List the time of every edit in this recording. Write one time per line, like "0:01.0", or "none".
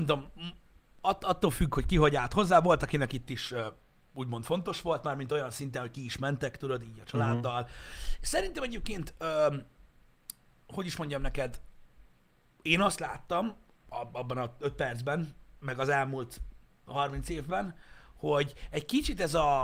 none

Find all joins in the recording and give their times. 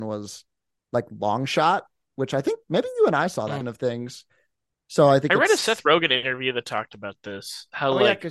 0:03.6

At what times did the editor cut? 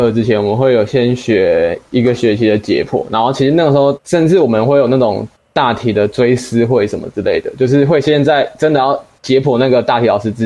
0:03.9

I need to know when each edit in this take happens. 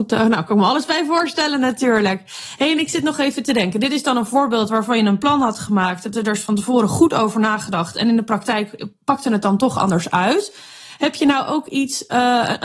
none

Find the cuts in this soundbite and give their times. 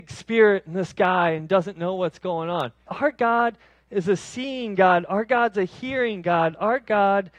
0:02.9

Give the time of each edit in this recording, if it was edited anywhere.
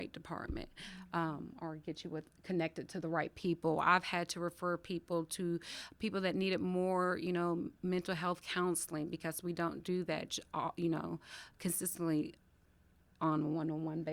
none

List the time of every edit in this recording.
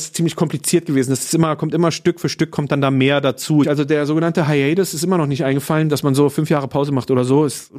0:03.6

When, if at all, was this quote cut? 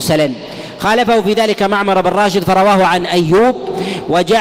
none

